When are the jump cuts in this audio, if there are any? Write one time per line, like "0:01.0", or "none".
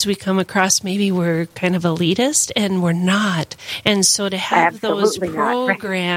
none